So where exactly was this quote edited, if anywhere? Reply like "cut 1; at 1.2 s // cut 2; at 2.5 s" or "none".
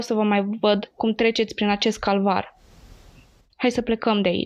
cut 1; at 3.5 s